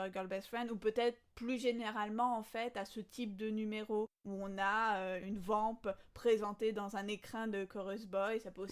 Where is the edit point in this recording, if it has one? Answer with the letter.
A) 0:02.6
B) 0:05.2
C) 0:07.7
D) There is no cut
B